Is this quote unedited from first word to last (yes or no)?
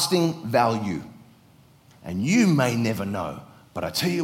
no